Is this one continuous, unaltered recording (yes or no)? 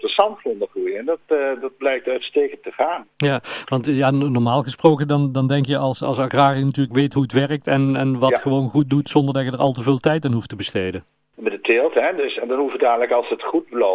no